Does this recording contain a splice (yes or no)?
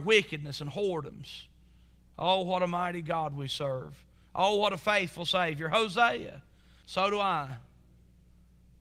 yes